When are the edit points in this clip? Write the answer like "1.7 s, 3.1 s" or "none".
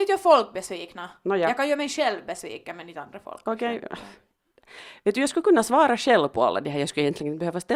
none